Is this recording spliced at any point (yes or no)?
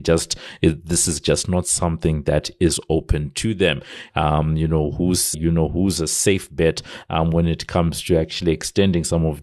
yes